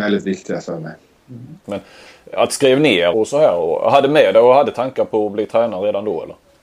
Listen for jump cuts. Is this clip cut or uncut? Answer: cut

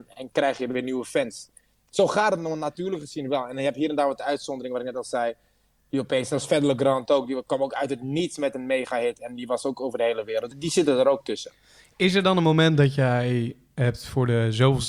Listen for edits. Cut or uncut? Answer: cut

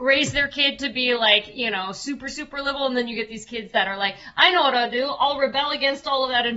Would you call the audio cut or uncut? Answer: uncut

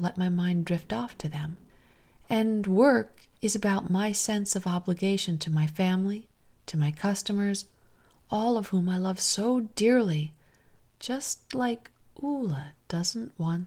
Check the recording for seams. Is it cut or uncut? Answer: cut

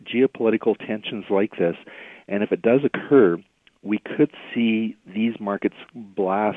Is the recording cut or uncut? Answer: uncut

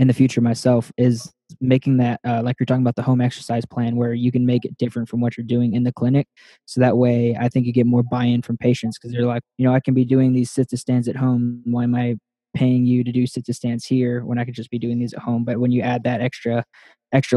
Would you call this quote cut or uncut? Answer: cut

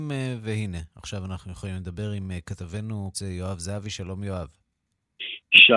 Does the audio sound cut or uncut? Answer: cut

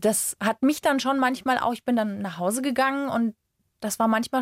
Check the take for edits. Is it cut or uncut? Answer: uncut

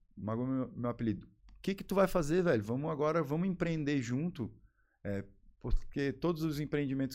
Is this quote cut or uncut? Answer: uncut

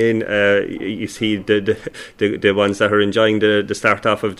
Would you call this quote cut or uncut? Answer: uncut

